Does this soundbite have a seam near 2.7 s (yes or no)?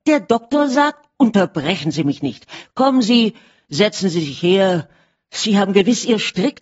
no